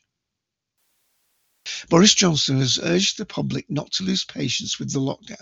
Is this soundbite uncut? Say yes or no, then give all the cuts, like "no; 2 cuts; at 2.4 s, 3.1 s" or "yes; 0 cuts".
yes; 0 cuts